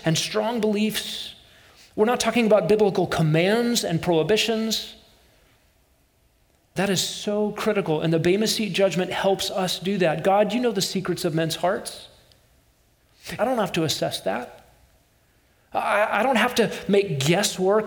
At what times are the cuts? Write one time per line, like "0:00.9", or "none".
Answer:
0:06.8
0:13.4